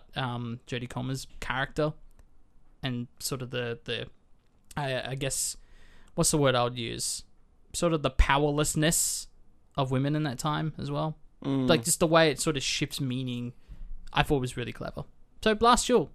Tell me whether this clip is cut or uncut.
uncut